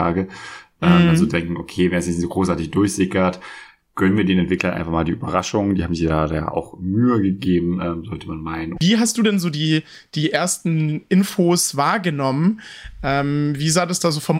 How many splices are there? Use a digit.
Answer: 1